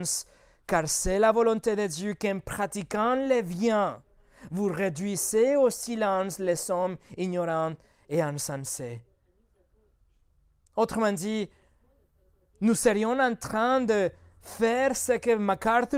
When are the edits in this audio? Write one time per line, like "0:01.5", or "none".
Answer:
none